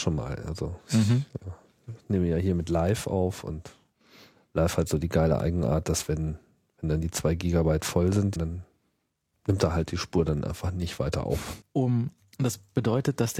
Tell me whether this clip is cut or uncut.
cut